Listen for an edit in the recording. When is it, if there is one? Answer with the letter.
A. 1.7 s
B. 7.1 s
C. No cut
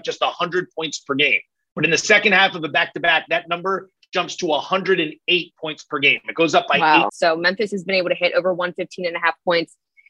B